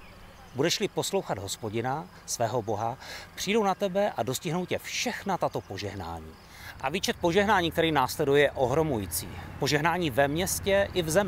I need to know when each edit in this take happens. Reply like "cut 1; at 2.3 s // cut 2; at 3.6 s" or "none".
none